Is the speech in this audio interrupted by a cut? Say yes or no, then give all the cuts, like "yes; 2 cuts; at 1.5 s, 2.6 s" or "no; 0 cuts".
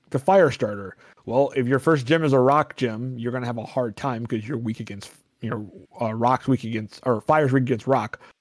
no; 0 cuts